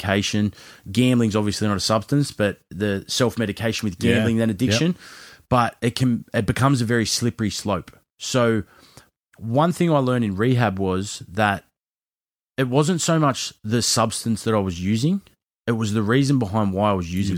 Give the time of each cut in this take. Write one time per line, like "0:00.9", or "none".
none